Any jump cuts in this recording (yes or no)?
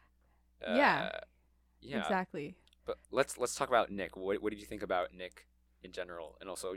yes